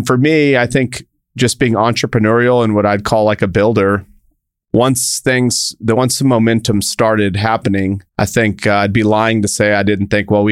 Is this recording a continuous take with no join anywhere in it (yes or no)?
no